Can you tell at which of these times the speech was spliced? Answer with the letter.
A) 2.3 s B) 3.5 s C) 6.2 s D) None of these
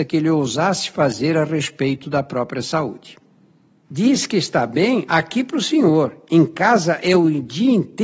D